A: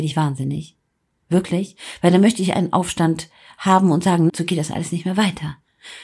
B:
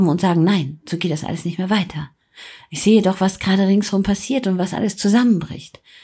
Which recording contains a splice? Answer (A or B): A